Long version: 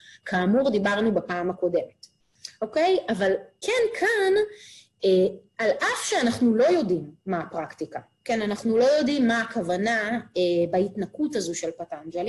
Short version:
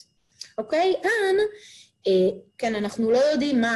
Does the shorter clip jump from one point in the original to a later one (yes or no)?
yes